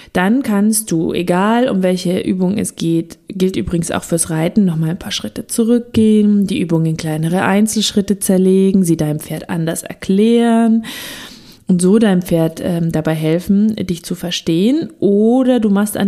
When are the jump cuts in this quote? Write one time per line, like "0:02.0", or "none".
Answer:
none